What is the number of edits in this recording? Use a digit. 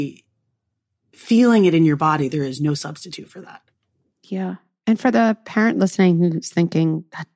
0